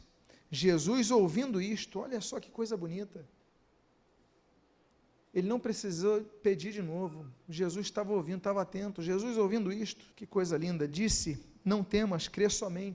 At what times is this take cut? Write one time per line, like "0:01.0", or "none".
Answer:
0:10.1